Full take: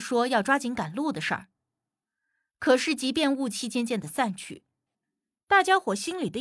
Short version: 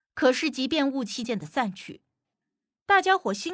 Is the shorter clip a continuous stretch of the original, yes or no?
no